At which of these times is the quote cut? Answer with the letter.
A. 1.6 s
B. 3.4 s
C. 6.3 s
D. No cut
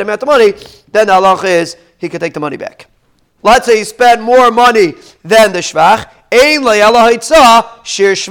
B